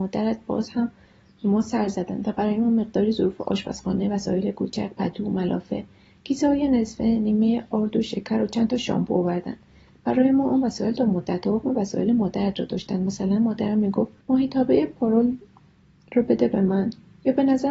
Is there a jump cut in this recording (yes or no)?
yes